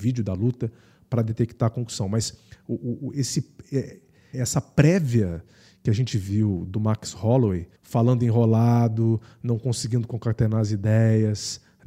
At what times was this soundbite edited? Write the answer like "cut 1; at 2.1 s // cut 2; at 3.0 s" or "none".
cut 1; at 4.3 s // cut 2; at 7.8 s